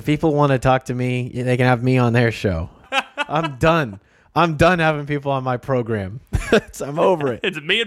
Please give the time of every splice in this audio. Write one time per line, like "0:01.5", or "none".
0:02.8